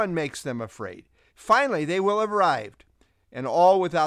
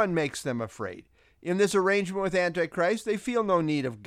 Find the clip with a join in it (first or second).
first